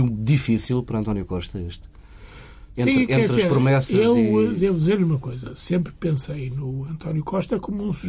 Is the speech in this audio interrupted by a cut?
no; 0 cuts

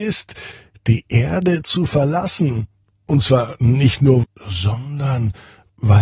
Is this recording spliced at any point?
yes; 1 cut; at 4.2 s

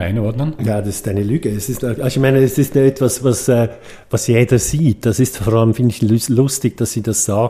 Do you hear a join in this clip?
no; 0 cuts

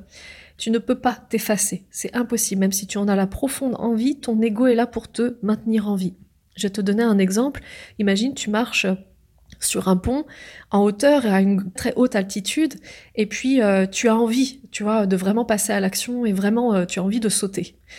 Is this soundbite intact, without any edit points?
no; 1 cut; at 11.8 s

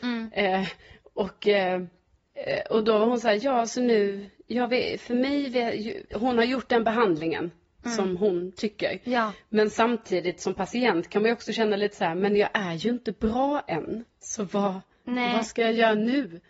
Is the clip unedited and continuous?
no; 1 cut; at 6.1 s

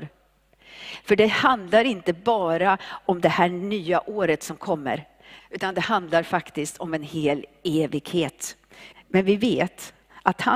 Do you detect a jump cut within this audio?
yes; 2 cuts; at 5.4 s, 8.9 s

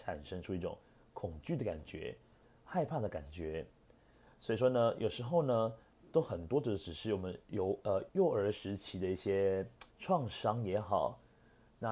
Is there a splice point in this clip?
yes; 2 cuts; at 8.1 s, 9.9 s

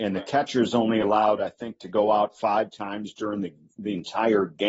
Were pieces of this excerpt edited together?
no; 0 cuts

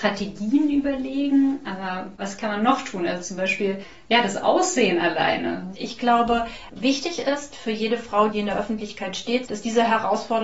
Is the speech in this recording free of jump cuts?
no; 3 cuts; at 5.7 s, 8.3 s, 9.4 s

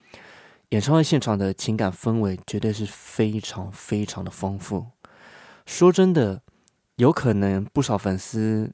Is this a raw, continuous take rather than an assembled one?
yes; 0 cuts

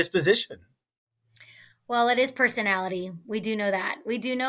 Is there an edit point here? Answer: no; 0 cuts

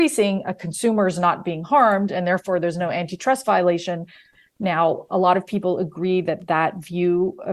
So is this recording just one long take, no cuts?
yes; 0 cuts

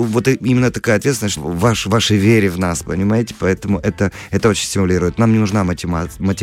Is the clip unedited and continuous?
no; 1 cut; at 1.4 s

